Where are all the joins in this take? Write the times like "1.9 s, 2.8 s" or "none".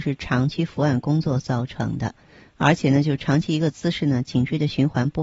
none